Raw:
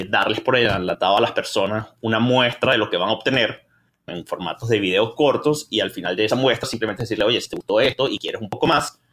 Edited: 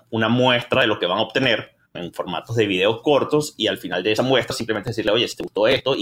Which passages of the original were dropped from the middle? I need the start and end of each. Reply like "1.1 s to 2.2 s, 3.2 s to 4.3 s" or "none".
3.8 s to 4.0 s